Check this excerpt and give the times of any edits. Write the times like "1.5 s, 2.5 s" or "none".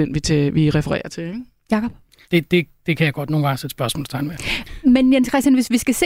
2.2 s

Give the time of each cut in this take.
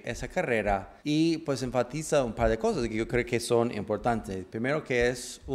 1.0 s

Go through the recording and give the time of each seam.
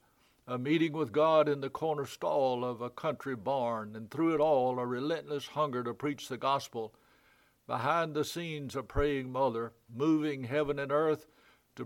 9.9 s

